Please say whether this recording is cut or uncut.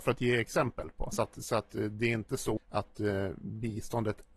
cut